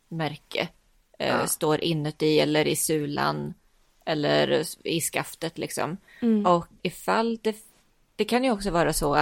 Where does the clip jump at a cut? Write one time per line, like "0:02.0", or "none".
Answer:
0:06.8